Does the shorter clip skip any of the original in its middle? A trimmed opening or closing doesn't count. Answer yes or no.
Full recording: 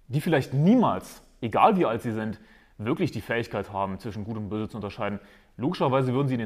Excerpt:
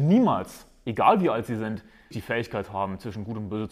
yes